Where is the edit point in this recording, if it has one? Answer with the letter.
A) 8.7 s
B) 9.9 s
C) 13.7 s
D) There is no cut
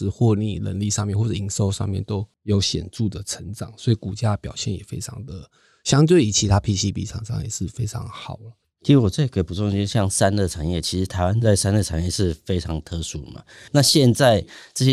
C